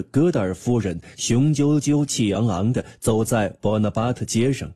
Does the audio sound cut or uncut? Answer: uncut